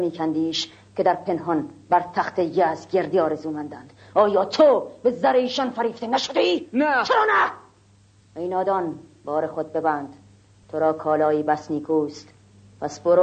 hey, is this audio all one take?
yes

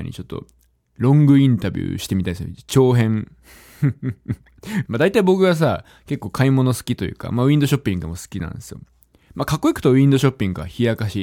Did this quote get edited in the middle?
yes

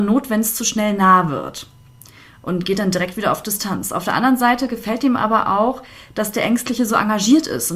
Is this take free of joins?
yes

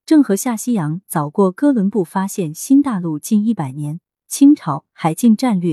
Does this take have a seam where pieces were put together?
yes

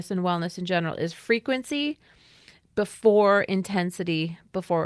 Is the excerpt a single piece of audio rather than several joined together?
yes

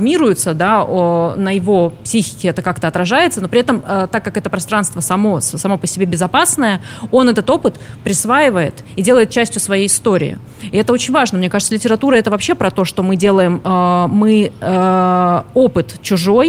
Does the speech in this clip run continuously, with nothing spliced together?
yes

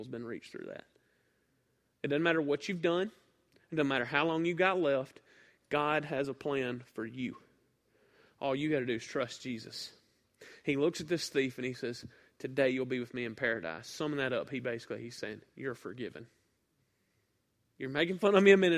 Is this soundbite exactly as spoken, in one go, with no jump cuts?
yes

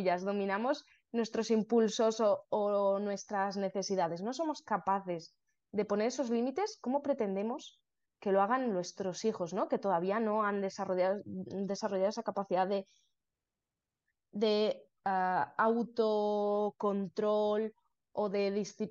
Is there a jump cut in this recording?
no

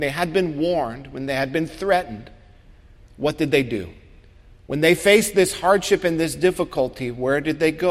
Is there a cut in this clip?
no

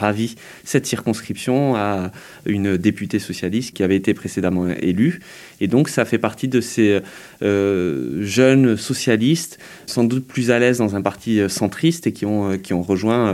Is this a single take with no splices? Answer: yes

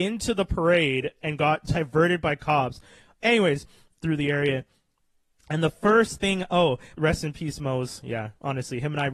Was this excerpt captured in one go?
no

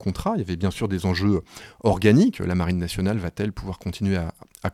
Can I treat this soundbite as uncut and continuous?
yes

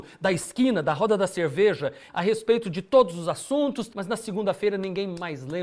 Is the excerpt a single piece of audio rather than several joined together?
no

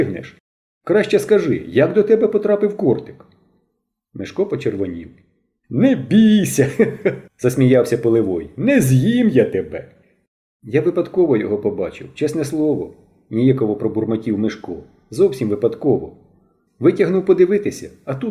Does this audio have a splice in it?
no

